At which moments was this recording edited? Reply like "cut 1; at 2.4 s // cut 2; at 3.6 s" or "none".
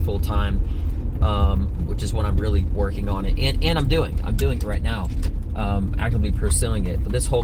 none